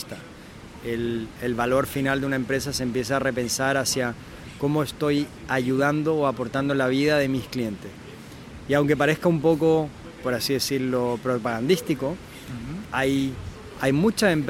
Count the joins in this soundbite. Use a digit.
1